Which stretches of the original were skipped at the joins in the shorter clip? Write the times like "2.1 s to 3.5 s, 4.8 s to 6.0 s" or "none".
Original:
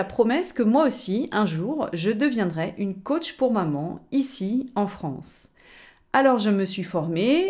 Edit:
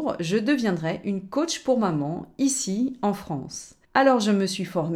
5.6 s to 6.0 s